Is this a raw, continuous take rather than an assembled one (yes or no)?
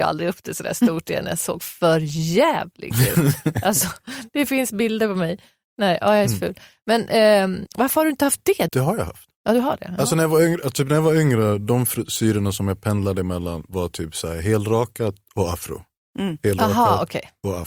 no